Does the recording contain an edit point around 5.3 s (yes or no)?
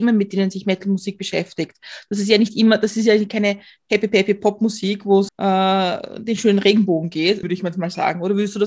yes